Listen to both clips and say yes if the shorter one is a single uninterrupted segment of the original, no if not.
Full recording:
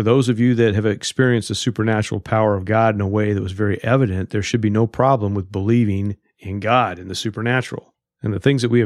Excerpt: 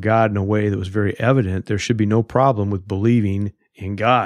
yes